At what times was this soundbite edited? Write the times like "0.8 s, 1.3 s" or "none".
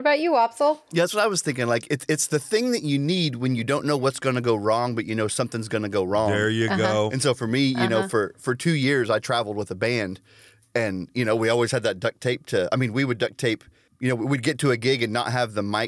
none

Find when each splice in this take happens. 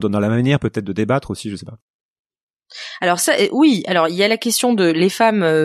none

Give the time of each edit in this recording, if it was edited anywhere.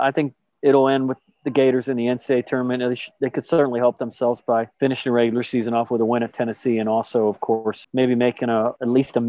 7.8 s

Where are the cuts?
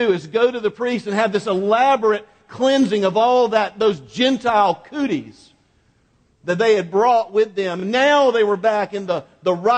none

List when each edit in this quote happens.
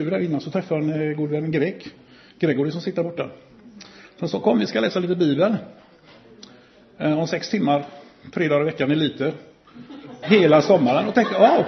10.2 s

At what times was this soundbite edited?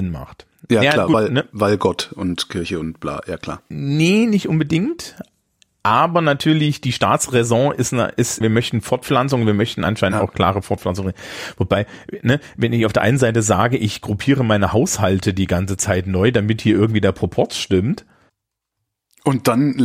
8.4 s

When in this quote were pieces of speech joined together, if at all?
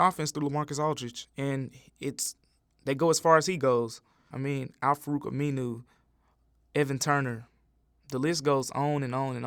4.3 s

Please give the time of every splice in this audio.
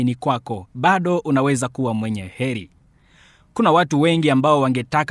none

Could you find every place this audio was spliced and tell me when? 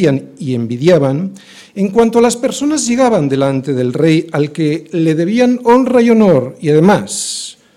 none

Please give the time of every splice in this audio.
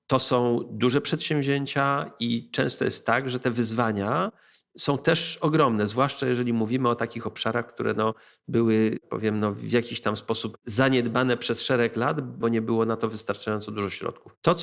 12.4 s

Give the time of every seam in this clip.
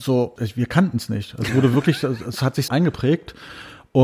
2.7 s

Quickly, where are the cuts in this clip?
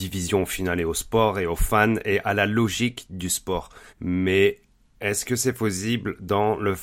3.9 s

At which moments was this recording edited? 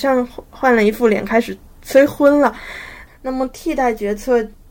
3.1 s

